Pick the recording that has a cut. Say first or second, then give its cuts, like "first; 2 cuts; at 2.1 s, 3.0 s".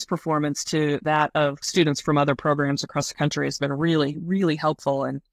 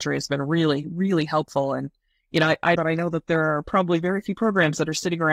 second; 1 cut; at 2.8 s